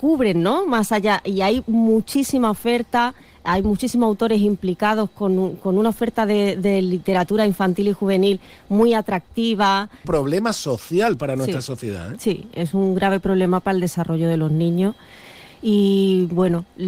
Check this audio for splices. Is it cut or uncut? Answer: cut